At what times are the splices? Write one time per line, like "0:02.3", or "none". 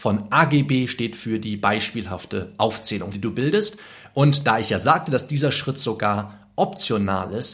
0:03.1